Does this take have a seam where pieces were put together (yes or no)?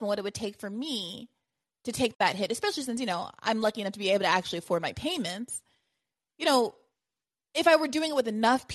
no